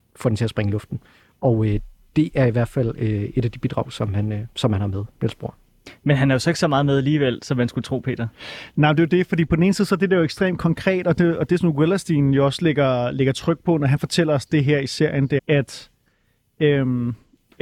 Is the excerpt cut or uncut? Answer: cut